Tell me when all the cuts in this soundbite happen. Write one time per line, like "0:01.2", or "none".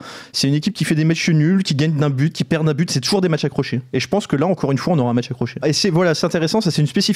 0:05.6